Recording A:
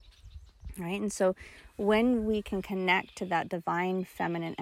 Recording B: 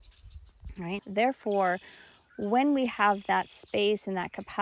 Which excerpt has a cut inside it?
B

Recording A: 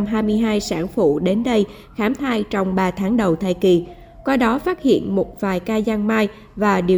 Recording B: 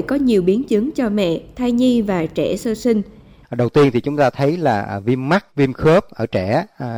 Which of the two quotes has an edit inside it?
B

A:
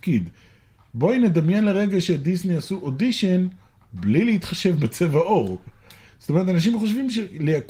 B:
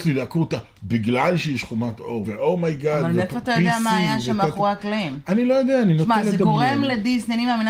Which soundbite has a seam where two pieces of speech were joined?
B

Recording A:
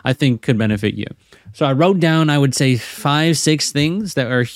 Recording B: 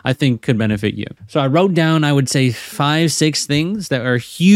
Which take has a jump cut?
B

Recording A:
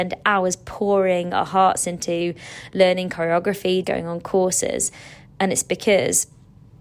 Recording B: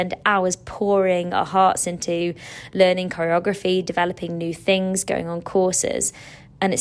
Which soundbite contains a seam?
A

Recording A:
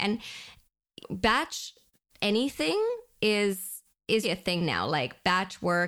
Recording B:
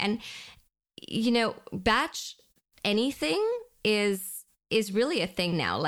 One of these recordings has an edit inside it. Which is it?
A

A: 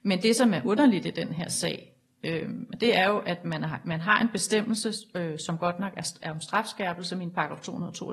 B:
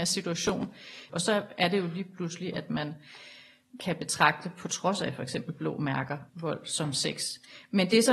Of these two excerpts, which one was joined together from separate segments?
B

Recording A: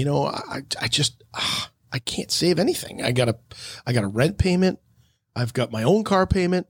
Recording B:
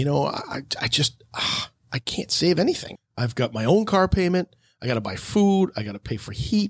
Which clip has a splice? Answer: B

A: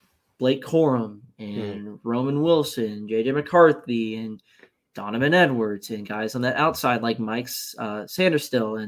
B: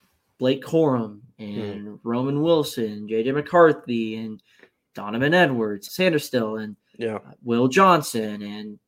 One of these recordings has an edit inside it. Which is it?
B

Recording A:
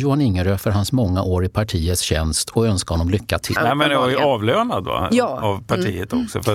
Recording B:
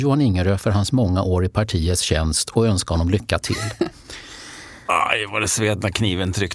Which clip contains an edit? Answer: A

